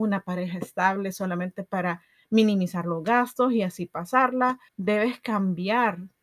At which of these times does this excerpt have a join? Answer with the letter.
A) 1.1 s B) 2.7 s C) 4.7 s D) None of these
C